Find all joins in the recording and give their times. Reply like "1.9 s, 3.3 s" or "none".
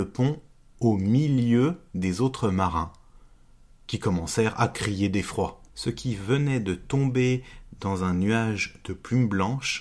5.7 s